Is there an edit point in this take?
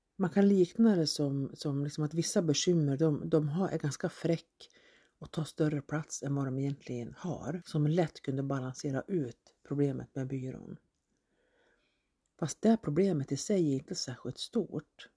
yes; 2 cuts; at 7.6 s, 12.2 s

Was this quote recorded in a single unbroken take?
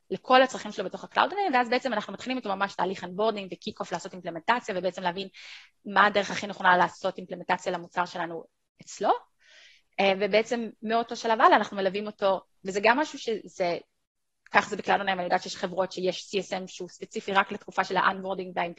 no; 1 cut; at 5.8 s

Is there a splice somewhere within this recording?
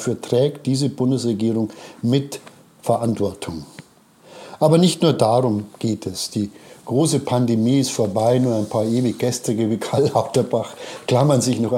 no; 0 cuts

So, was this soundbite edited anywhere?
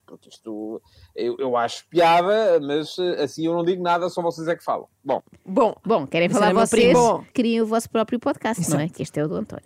yes; 1 cut; at 7.3 s

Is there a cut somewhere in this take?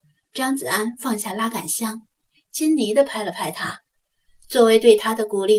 no; 0 cuts

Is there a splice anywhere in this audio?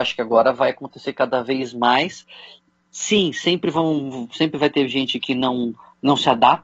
no; 0 cuts

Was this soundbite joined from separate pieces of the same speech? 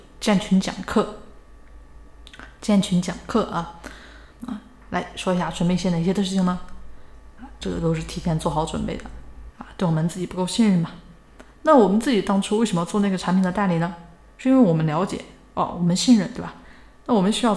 yes; 3 cuts; at 4.3 s, 7.6 s, 9.5 s

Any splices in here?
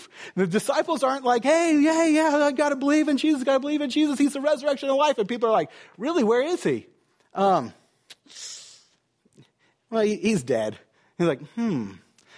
no; 0 cuts

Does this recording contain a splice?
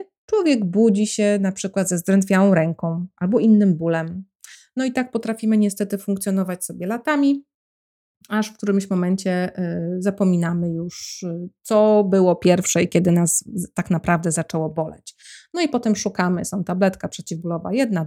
no; 0 cuts

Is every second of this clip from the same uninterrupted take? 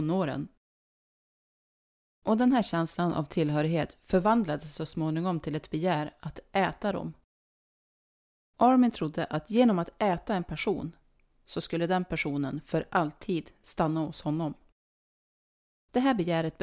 no; 1 cut; at 2.0 s

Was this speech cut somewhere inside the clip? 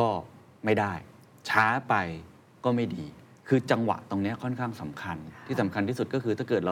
no; 0 cuts

